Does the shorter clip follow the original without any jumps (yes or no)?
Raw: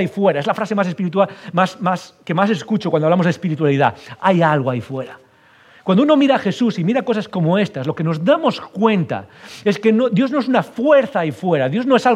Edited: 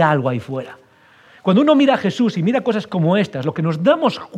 yes